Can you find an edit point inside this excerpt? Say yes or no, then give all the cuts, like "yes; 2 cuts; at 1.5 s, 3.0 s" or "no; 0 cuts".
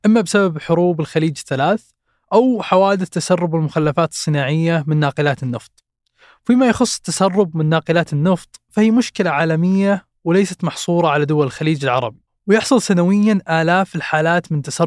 no; 0 cuts